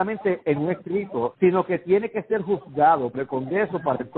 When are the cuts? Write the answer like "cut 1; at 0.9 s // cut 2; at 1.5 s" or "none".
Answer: cut 1; at 1.3 s